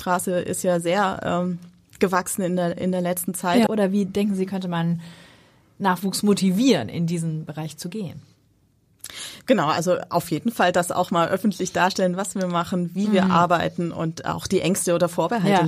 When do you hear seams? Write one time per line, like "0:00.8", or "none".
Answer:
0:03.7